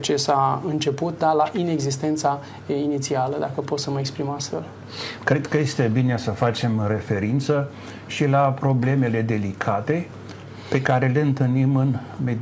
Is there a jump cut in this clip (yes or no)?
yes